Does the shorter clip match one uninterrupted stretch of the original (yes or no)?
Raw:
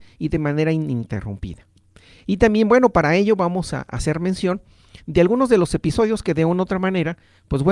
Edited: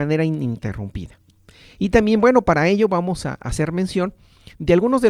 yes